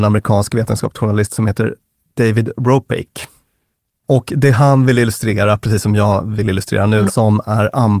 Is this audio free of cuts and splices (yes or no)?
no